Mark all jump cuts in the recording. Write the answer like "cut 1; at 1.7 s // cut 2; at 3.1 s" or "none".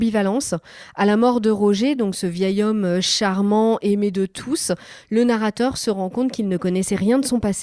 none